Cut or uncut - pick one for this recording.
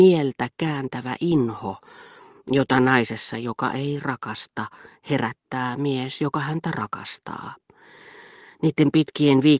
uncut